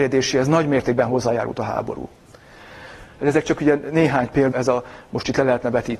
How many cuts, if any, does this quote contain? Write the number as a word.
two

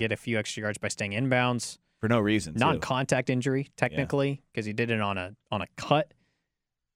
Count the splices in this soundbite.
zero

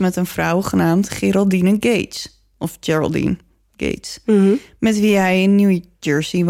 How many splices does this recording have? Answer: zero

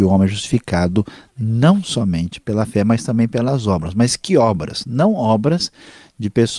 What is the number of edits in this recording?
zero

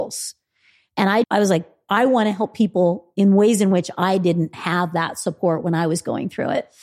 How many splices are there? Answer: one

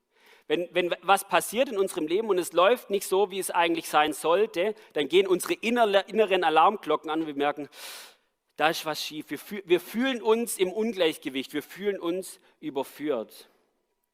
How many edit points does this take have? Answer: zero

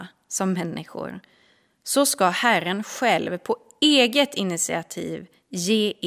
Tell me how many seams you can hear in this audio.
zero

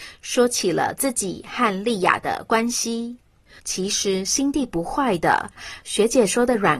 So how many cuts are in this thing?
one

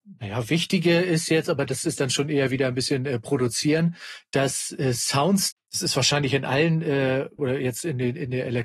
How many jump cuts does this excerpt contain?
two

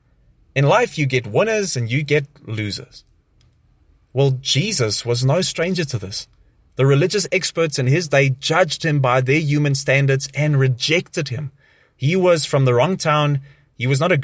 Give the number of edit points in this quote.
zero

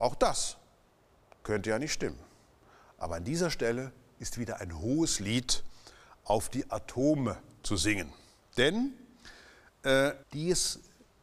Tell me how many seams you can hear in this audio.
one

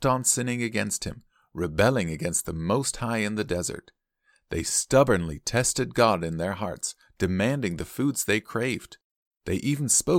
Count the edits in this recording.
zero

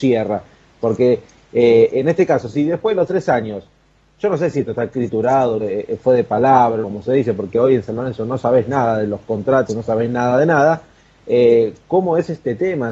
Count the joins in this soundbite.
three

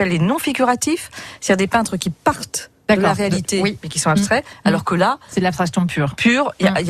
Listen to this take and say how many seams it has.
zero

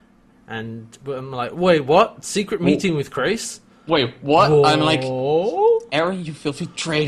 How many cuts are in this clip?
zero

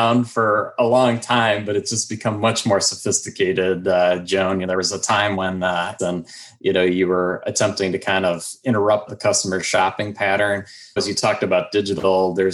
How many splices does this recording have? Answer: three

